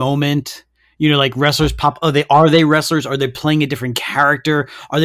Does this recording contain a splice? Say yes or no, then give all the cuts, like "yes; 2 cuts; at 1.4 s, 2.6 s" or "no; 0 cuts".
no; 0 cuts